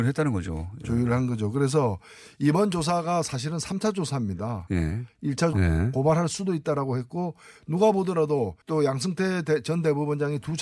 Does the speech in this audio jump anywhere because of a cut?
yes; 2 cuts; at 5.5 s, 8.6 s

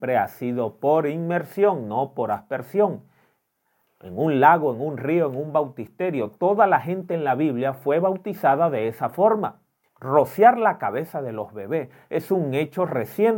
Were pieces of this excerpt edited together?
yes; 1 cut; at 9.9 s

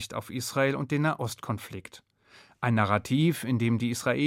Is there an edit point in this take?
no; 0 cuts

